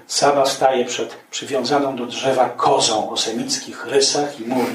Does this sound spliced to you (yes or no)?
no